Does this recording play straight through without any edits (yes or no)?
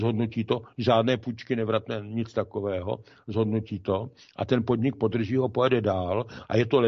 yes